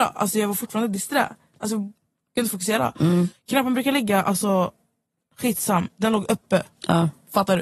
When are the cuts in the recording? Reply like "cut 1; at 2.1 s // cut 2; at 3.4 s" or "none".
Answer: cut 1; at 3.3 s